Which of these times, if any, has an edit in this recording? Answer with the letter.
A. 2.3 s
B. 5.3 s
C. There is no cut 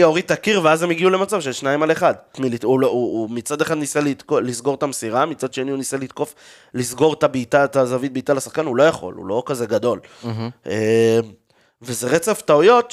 A